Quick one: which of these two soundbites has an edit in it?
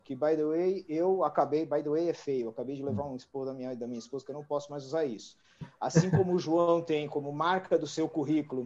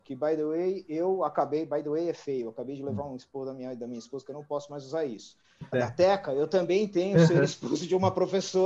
second; 1 cut; at 5.7 s

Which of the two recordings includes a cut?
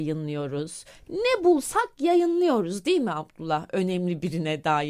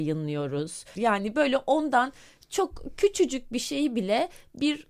second; 1 cut; at 0.9 s

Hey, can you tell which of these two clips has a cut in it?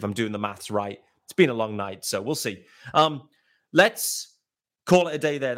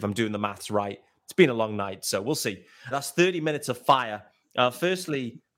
second; 1 cut; at 2.9 s

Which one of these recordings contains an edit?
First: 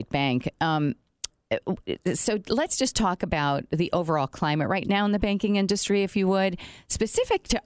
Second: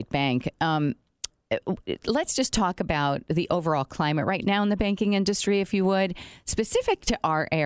second; 1 cut; at 2.0 s

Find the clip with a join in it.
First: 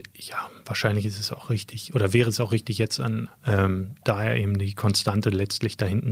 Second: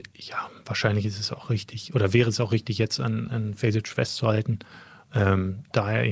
first; 1 cut; at 3.3 s

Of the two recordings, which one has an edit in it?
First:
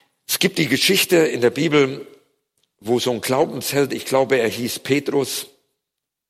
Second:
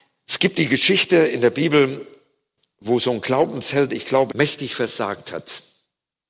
second; 1 cut; at 4.3 s

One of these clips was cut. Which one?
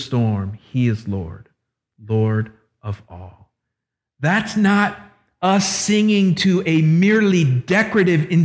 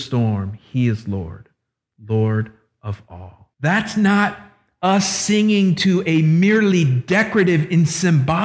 second; 1 cut; at 3.5 s

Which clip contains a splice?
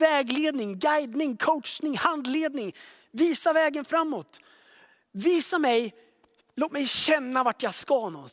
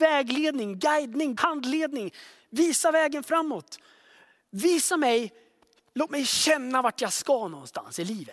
second; 1 cut; at 1.4 s

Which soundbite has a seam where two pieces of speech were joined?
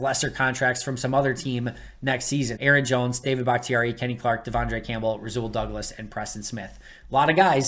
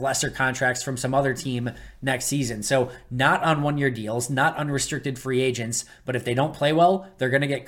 first; 1 cut; at 2.6 s

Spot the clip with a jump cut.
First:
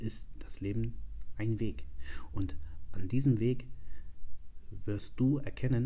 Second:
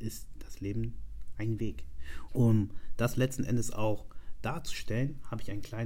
second; 1 cut; at 2.3 s

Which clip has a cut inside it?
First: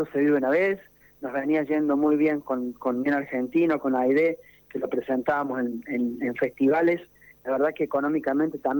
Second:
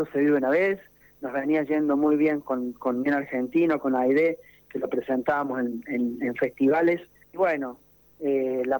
second; 1 cut; at 7.2 s

